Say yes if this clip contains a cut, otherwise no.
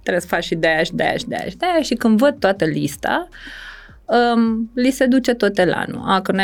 no